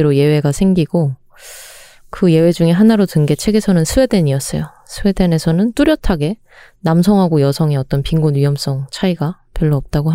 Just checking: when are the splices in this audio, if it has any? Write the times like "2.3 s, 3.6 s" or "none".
none

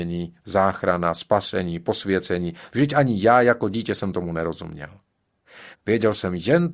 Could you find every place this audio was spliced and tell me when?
2.7 s, 5.7 s

